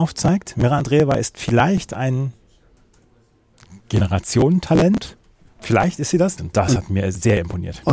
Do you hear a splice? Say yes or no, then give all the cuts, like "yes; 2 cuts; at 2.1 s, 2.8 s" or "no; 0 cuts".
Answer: yes; 1 cut; at 6.4 s